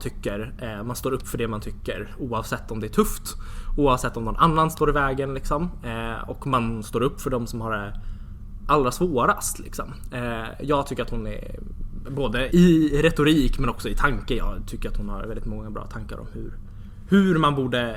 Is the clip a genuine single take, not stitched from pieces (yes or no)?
no